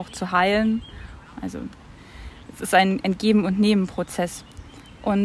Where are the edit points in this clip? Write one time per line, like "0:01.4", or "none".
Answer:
0:01.2